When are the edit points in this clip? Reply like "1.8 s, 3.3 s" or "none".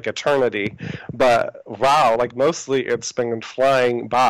none